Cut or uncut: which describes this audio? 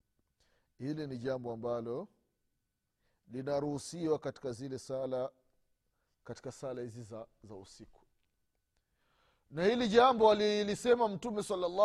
uncut